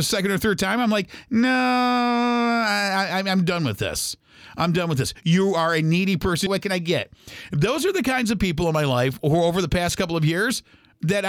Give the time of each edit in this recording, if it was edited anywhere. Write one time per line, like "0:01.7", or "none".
0:06.5

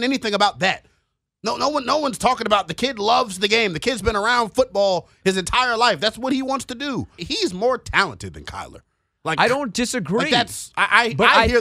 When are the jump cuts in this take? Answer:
0:07.2

